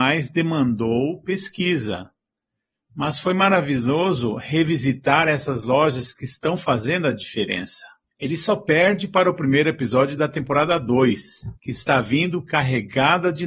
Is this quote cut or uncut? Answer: cut